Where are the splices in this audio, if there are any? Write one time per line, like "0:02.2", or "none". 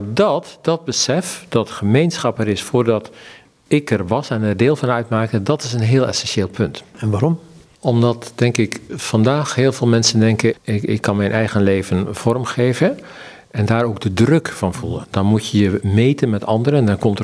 0:10.5
0:15.0